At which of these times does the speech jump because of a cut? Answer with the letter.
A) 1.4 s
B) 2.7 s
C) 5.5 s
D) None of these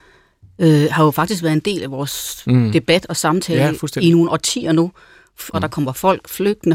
C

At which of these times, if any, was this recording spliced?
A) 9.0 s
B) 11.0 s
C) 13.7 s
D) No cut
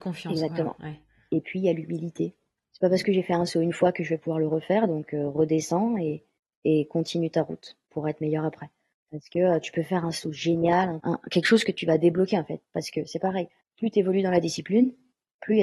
B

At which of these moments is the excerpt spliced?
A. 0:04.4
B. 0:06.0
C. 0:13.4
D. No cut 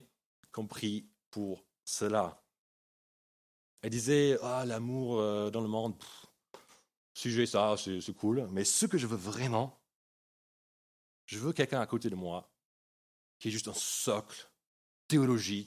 B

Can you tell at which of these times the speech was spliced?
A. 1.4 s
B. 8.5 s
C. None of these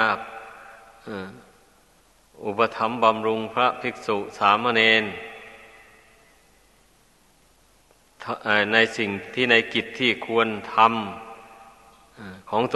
C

